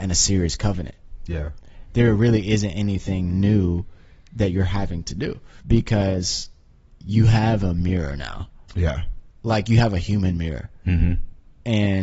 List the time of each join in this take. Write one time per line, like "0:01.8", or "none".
0:05.6
0:09.3